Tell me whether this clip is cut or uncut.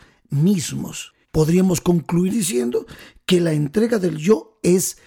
cut